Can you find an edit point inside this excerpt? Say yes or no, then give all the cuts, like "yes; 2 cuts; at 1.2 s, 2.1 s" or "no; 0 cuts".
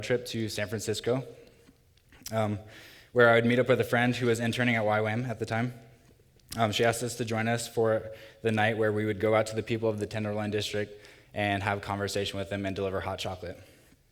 no; 0 cuts